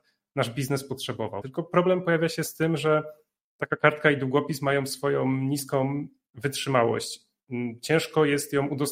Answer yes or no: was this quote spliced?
yes